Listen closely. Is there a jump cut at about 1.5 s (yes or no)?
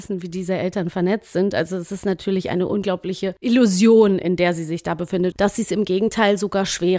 no